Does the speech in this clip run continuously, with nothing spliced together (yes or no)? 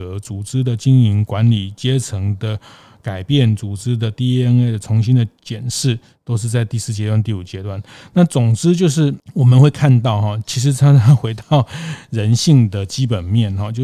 yes